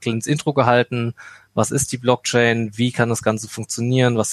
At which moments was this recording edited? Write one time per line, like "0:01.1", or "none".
none

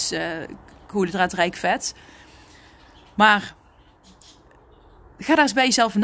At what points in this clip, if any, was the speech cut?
none

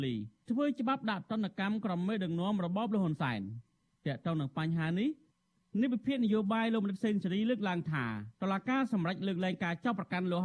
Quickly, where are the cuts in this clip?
0:08.3

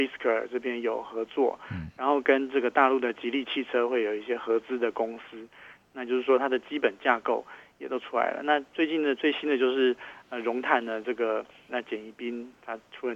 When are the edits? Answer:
0:11.7

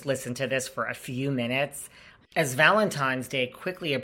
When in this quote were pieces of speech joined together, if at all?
0:02.2

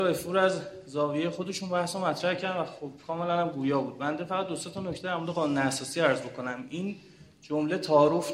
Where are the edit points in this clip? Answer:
none

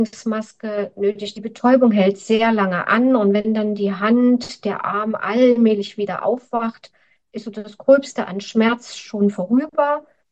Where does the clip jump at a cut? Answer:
0:01.3

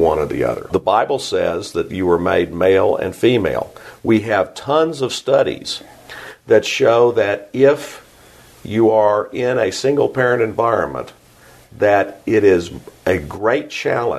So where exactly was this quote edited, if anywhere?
none

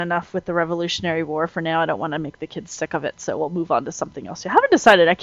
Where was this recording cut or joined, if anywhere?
none

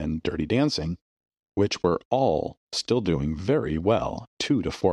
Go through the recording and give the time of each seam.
none

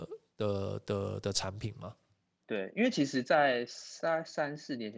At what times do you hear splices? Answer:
0:02.4

